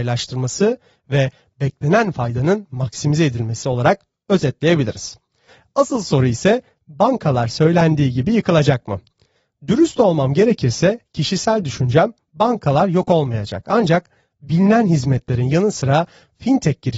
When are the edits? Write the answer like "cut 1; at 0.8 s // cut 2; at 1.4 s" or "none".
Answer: none